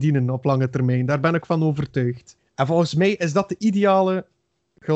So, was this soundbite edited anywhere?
yes; 1 cut; at 2.4 s

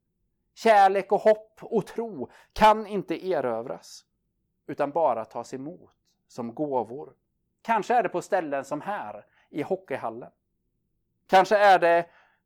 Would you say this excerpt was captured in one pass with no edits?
no; 1 cut; at 7.5 s

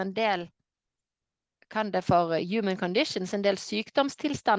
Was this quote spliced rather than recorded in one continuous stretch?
no; 0 cuts

